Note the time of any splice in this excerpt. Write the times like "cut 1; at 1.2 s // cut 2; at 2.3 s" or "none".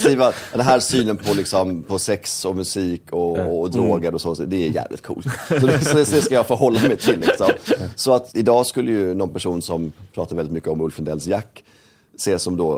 none